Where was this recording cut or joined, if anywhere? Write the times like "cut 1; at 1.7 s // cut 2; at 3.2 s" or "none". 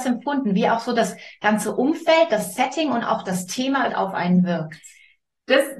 cut 1; at 3.9 s